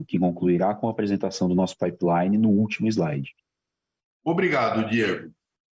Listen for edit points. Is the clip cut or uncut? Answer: uncut